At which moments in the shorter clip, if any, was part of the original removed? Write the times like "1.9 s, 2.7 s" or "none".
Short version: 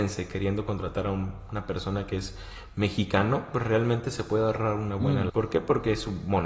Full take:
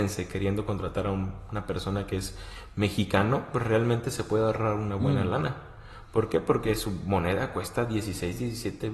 5.3 s